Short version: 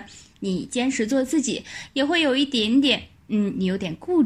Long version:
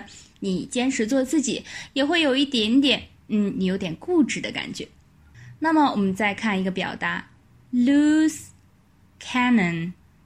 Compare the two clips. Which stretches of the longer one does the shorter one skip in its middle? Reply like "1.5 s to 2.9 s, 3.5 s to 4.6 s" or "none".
none